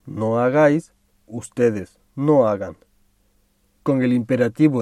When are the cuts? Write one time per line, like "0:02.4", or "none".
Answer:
0:03.8